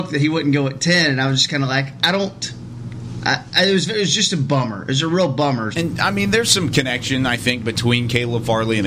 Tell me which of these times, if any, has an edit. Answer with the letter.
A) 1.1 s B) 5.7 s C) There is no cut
B